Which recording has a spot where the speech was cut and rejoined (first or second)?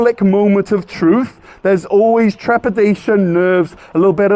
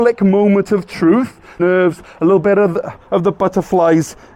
second